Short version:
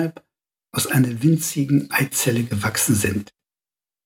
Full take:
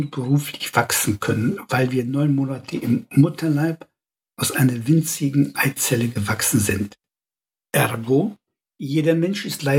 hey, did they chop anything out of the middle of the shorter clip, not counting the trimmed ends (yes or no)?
no